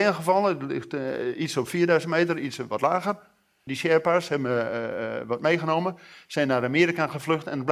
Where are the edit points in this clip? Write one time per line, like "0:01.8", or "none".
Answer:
0:03.7